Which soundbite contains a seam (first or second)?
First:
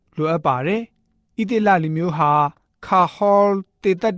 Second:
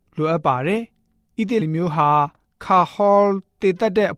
second